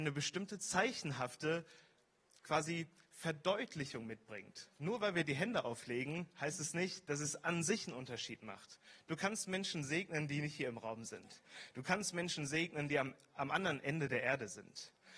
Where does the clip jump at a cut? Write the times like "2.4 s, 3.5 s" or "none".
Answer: none